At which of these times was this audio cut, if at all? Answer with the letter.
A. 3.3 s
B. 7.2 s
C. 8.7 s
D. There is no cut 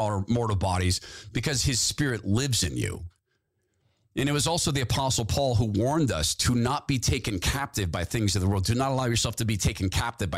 D